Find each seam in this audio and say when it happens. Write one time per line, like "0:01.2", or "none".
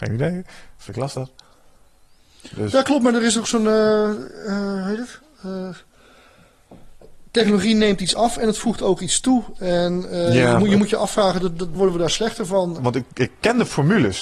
0:11.8
0:12.8